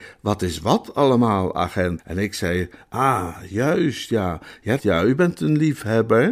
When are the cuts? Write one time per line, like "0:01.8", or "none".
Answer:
0:02.0
0:04.8

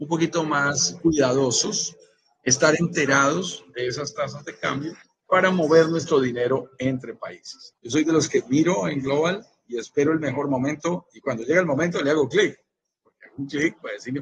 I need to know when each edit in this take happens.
0:07.7

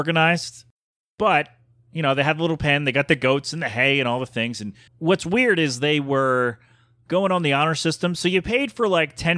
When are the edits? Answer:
0:04.9

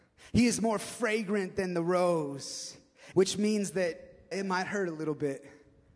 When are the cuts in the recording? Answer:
0:03.1
0:04.3

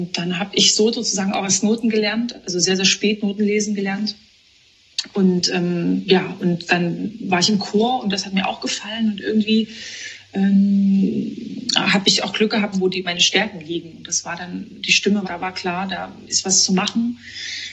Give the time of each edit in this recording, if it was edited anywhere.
0:12.7
0:15.2

